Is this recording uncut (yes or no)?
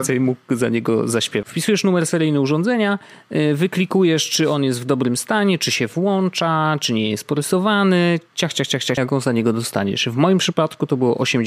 no